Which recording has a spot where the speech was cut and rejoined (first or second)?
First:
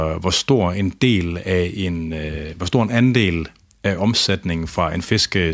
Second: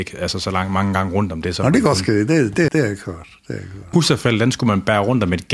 second